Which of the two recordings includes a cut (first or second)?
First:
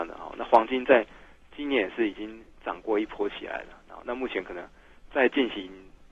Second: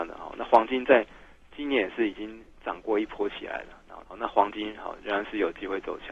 second